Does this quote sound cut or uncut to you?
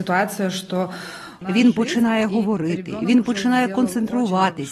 cut